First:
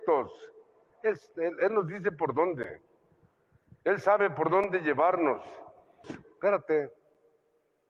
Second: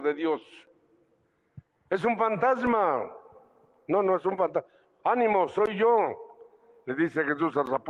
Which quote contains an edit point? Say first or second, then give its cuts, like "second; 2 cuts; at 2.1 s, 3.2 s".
first; 2 cuts; at 1.0 s, 6.0 s